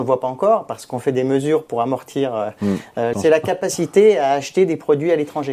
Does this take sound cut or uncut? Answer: cut